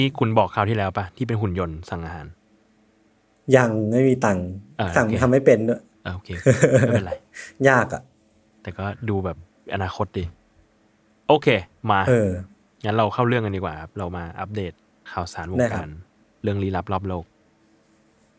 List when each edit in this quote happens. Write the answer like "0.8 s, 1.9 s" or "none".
none